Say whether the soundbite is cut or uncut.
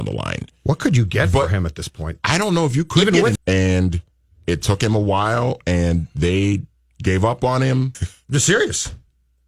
cut